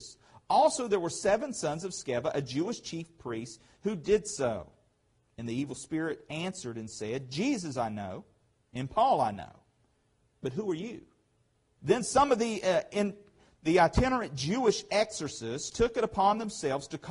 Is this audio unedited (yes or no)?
no